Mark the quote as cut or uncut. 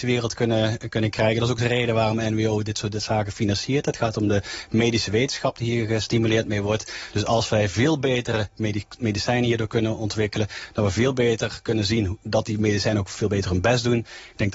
uncut